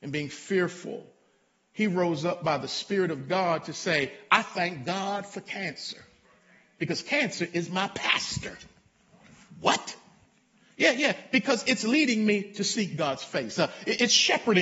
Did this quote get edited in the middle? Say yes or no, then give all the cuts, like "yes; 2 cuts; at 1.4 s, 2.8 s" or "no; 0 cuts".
no; 0 cuts